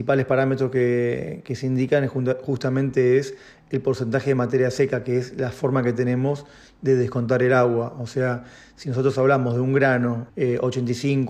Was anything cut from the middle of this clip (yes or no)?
yes